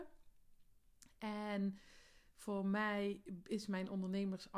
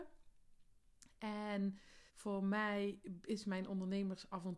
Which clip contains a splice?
second; 1 cut; at 2.1 s

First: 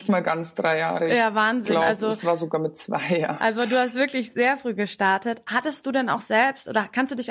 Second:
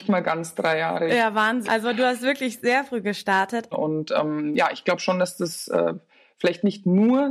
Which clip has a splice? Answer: second; 2 cuts; at 1.7 s, 3.7 s

